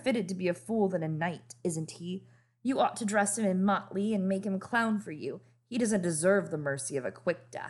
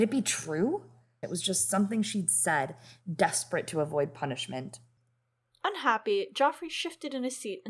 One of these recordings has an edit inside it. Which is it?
second; 1 cut; at 1.2 s

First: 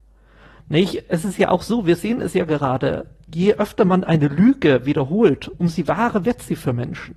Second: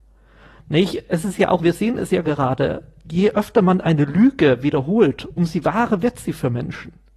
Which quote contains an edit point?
second; 1 cut; at 1.6 s

